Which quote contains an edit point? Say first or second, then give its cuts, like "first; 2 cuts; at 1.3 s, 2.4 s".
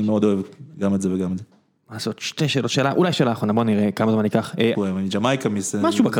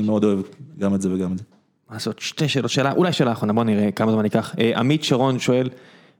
first; 1 cut; at 4.7 s